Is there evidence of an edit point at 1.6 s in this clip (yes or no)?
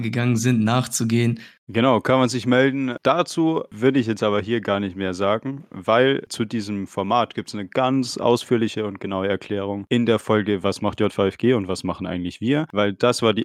yes